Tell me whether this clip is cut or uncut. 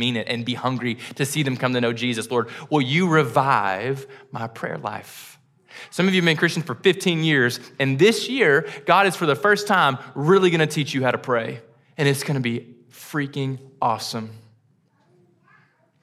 uncut